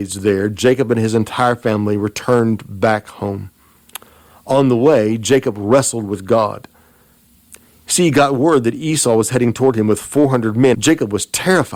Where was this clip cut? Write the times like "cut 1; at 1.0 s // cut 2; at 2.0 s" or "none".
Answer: cut 1; at 10.7 s